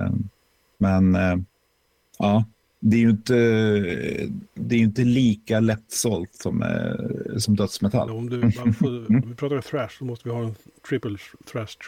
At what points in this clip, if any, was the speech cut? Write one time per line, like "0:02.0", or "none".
0:08.1
0:09.2